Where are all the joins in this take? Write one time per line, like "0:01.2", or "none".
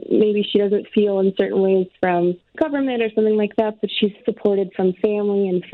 0:02.5
0:04.2